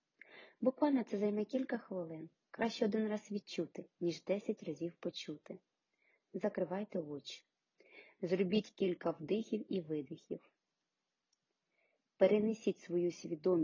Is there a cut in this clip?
no; 0 cuts

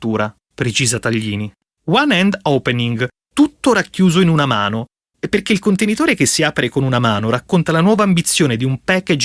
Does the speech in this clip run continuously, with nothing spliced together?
yes; 0 cuts

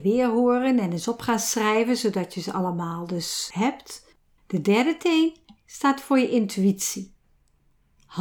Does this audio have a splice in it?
yes; 1 cut; at 4.4 s

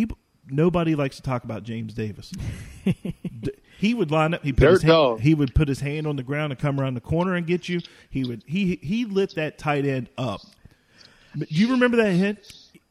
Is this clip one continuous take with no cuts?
yes; 0 cuts

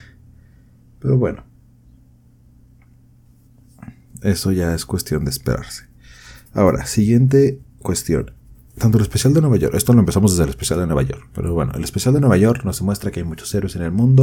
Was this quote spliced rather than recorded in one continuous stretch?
no; 0 cuts

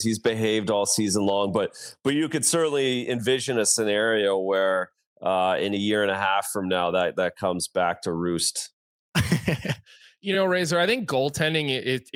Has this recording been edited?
no; 0 cuts

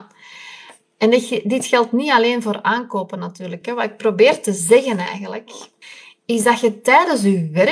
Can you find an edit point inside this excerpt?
no; 0 cuts

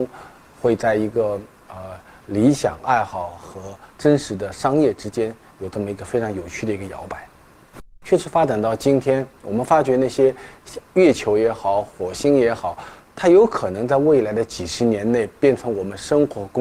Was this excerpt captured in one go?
no; 2 cuts; at 8.0 s, 13.0 s

